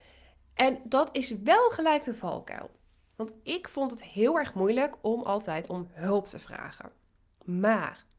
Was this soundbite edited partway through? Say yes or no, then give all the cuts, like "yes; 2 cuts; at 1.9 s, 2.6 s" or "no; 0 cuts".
no; 0 cuts